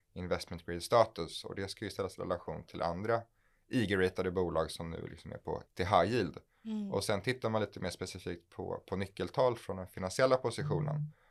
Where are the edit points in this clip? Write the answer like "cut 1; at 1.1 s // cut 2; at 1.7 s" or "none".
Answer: cut 1; at 5.6 s